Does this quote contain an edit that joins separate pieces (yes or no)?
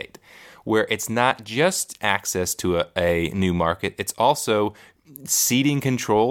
no